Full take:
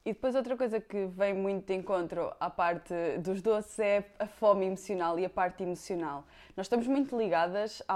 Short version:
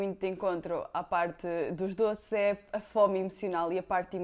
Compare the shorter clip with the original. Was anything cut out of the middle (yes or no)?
no